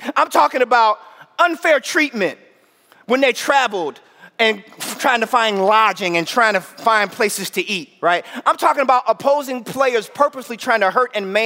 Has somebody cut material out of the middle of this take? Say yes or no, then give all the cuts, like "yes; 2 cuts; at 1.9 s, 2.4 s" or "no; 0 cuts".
no; 0 cuts